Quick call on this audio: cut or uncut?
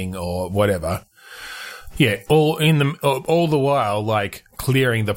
cut